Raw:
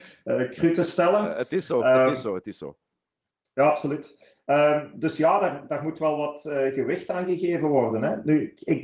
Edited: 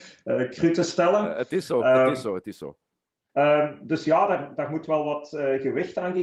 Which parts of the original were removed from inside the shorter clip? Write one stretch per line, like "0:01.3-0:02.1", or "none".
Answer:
0:03.3-0:04.4